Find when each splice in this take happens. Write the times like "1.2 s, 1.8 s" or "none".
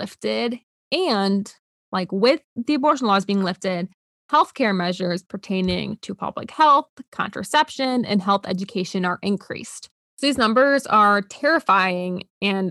10.0 s